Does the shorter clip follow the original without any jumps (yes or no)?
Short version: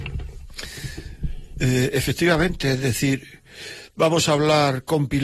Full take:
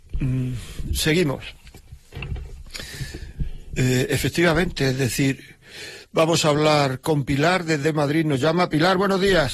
yes